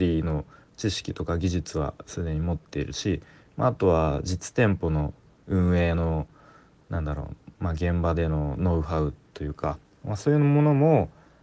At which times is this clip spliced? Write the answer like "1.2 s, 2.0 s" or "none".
none